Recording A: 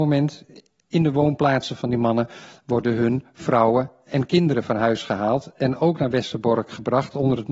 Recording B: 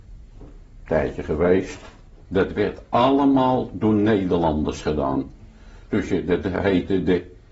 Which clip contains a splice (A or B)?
B